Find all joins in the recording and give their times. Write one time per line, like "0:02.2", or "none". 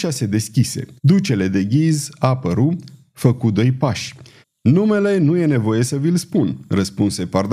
0:01.0
0:04.4